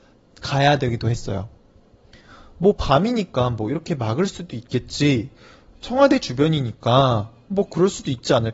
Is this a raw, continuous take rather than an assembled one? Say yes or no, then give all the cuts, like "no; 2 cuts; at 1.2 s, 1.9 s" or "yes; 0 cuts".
yes; 0 cuts